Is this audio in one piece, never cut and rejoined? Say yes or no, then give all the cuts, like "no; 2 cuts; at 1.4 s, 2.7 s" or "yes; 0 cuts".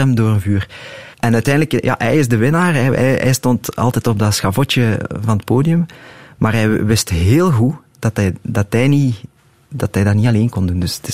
no; 1 cut; at 1.1 s